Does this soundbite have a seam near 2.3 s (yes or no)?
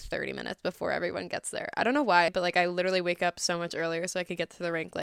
yes